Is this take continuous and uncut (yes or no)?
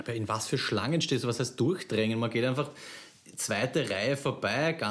yes